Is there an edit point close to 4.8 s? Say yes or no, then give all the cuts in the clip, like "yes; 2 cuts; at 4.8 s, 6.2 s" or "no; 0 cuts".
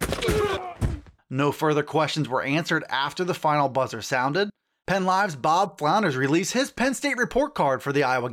yes; 2 cuts; at 1.2 s, 4.8 s